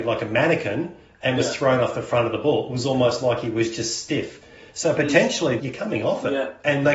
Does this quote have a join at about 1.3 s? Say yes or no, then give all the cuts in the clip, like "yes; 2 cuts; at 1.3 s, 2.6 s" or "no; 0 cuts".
no; 1 cut; at 5.6 s